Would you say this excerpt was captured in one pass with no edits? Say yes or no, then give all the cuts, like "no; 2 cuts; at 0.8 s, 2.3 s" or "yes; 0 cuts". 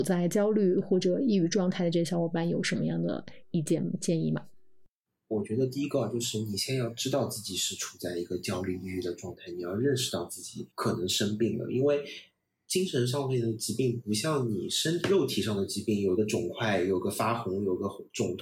no; 1 cut; at 10.7 s